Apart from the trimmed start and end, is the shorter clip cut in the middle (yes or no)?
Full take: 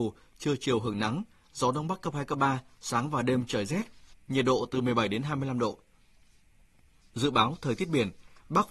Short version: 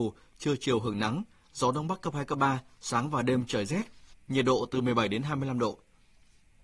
no